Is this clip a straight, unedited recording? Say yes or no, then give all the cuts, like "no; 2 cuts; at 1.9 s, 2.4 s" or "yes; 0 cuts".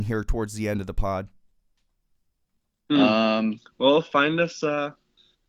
yes; 0 cuts